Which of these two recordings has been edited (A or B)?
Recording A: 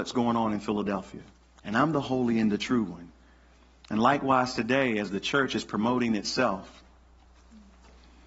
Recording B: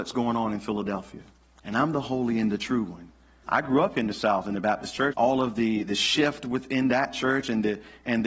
B